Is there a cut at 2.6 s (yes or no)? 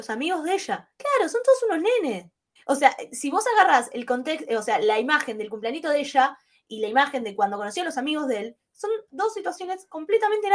yes